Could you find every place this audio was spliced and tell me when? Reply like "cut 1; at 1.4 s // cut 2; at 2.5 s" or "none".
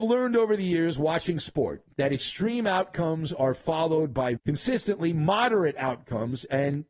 cut 1; at 4.4 s